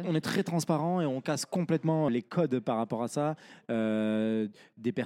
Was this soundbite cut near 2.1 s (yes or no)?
yes